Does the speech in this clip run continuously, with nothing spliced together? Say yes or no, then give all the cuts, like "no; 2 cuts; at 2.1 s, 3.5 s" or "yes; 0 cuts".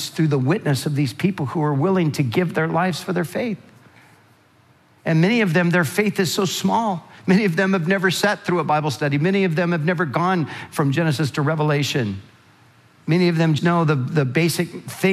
no; 1 cut; at 13.6 s